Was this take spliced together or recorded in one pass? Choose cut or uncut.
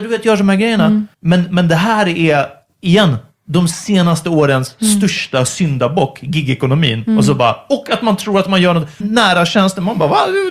cut